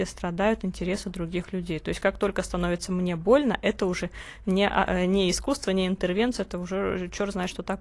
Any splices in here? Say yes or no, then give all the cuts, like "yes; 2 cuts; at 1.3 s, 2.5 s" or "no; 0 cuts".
no; 0 cuts